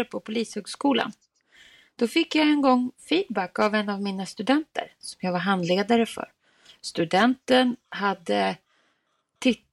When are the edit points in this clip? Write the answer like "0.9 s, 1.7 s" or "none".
none